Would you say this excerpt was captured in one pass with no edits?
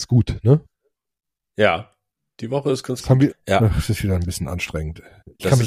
no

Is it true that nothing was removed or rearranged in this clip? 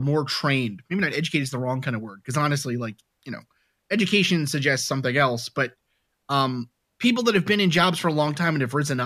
yes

